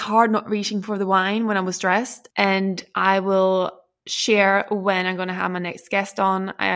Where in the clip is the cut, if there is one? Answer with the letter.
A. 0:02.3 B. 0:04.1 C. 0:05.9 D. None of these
A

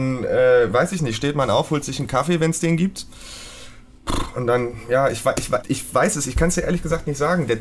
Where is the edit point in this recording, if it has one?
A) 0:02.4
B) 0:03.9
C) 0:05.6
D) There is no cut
C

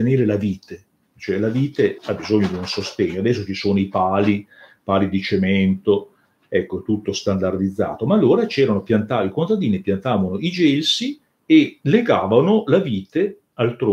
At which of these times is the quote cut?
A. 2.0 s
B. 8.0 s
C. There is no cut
A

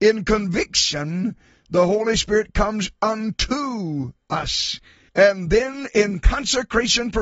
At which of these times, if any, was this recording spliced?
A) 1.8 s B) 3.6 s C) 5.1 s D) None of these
C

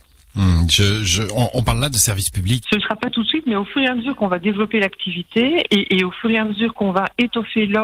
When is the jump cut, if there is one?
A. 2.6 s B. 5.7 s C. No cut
A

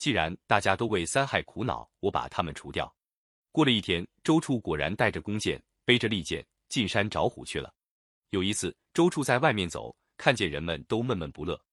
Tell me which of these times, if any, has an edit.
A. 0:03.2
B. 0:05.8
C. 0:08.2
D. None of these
C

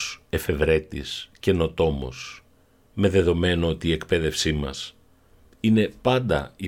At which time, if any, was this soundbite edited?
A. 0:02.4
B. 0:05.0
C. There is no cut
C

